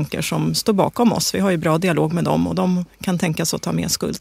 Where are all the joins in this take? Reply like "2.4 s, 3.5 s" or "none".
none